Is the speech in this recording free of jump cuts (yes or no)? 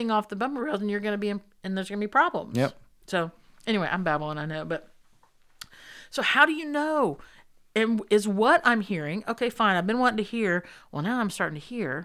yes